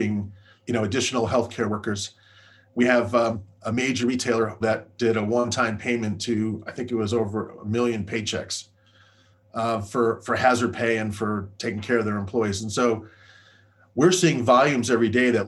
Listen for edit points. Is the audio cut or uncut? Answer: cut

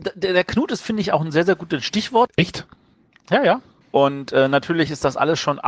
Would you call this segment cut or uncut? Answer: cut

